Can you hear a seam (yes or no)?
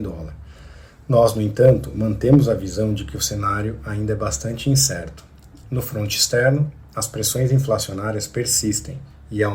no